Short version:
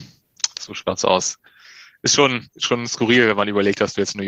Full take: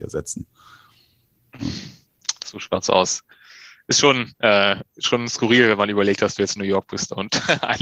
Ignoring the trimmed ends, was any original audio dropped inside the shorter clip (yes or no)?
yes